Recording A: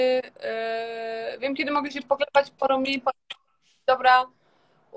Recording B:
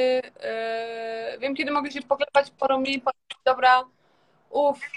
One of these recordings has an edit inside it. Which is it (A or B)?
B